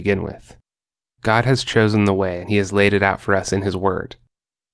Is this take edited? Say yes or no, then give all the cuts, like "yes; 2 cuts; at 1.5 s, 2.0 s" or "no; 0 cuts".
no; 0 cuts